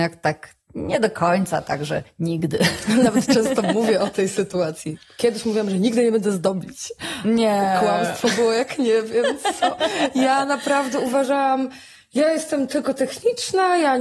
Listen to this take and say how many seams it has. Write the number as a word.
zero